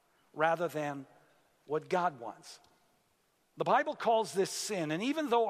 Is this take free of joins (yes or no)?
yes